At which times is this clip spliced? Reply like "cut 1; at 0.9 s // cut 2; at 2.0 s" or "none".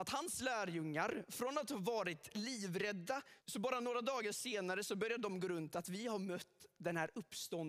cut 1; at 3.4 s